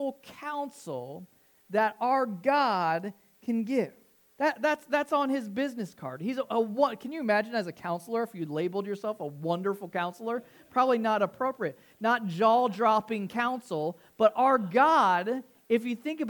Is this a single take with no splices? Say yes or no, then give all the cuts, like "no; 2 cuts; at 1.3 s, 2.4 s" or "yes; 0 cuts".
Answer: yes; 0 cuts